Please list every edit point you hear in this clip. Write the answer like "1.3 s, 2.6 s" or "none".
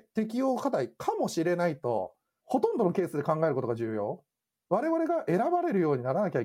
4.5 s